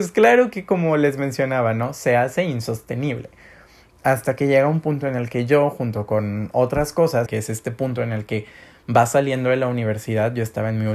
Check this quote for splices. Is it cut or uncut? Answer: cut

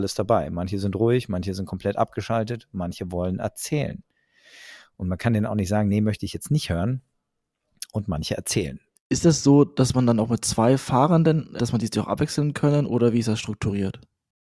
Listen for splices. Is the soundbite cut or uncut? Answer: cut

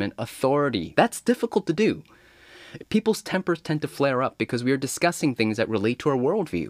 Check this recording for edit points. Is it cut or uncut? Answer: cut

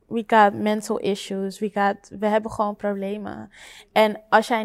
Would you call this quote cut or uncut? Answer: uncut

